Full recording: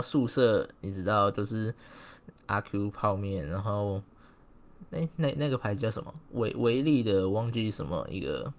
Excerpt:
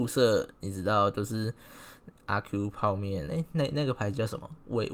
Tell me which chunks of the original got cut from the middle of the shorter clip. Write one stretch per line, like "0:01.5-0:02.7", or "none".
0:03.5-0:04.9